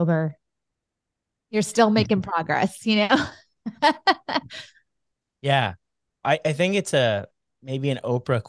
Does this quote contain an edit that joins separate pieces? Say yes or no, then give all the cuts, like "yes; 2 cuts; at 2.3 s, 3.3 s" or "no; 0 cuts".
yes; 1 cut; at 6.2 s